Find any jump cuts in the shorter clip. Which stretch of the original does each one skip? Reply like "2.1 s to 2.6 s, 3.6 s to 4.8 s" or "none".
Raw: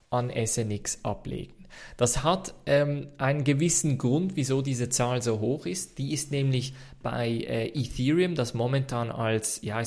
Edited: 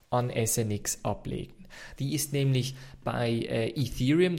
2.0 s to 5.9 s